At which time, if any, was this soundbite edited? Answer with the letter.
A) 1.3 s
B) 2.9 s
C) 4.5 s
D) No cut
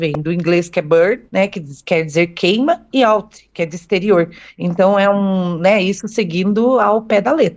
A